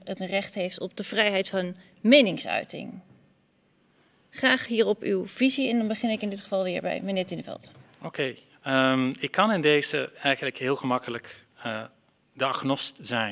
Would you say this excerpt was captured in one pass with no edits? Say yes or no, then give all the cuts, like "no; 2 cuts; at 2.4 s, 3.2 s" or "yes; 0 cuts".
yes; 0 cuts